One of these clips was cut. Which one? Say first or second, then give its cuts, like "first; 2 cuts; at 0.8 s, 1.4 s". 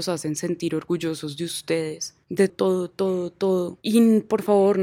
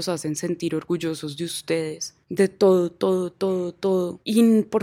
first; 1 cut; at 2.5 s